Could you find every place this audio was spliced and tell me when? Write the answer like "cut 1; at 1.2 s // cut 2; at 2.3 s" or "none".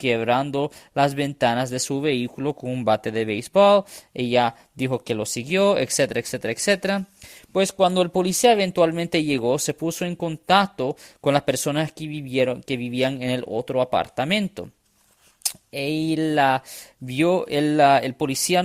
none